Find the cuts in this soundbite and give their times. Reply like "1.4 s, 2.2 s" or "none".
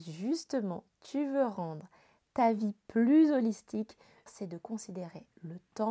4.3 s